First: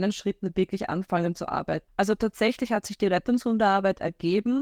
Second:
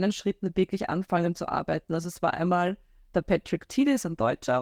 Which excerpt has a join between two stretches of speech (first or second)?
first